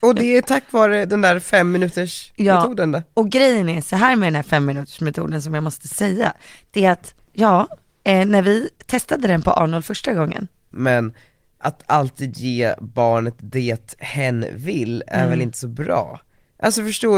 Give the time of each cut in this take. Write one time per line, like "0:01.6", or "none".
0:10.7